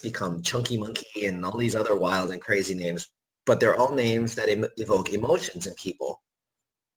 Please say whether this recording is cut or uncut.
uncut